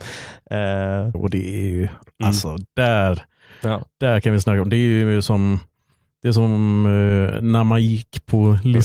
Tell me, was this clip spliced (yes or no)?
yes